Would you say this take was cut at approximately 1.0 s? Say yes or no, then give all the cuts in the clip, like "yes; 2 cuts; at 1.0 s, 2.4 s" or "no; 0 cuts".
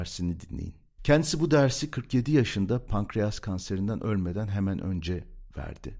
yes; 1 cut; at 1.0 s